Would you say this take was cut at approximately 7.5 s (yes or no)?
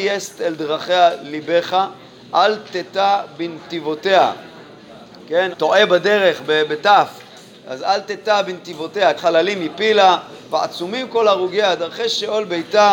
no